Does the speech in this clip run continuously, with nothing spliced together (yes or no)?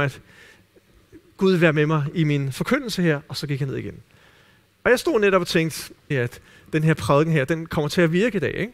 no